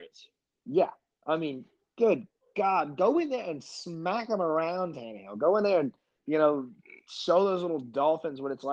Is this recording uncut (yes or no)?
yes